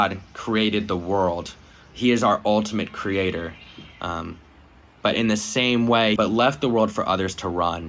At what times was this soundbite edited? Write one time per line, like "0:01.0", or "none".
0:06.2